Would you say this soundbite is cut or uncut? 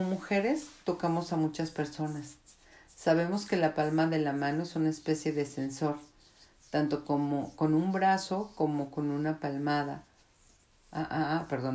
uncut